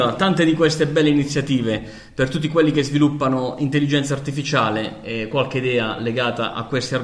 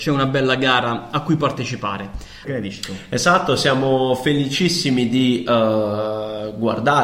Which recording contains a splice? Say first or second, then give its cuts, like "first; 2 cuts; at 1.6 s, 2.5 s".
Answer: second; 1 cut; at 2.4 s